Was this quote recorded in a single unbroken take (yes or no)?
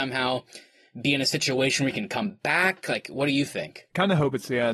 yes